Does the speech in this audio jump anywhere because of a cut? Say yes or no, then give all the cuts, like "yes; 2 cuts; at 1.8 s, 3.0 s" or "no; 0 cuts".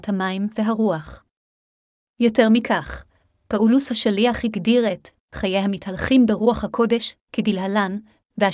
no; 0 cuts